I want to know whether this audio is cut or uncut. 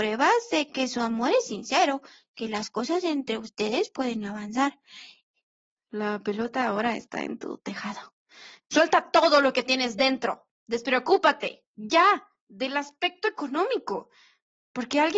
cut